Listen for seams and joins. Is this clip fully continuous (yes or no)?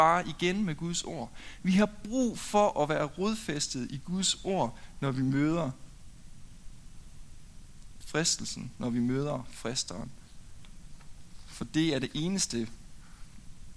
yes